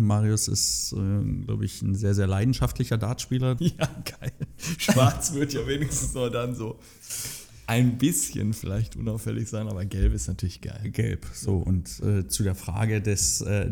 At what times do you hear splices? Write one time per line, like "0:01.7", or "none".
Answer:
0:03.6